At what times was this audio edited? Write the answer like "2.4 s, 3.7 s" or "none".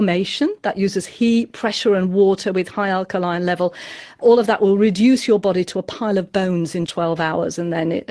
4.2 s, 6.9 s